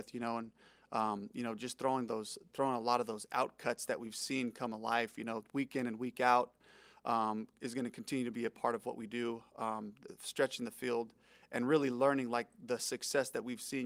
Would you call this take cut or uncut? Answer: uncut